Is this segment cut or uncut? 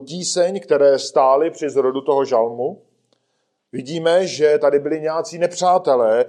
cut